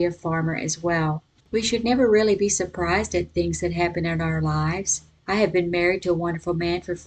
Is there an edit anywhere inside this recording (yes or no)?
yes